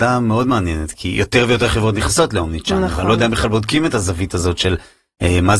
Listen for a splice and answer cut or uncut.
uncut